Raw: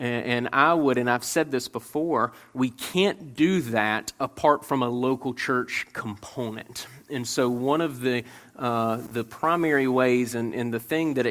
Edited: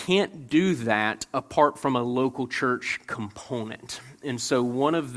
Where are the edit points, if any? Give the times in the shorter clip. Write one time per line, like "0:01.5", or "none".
none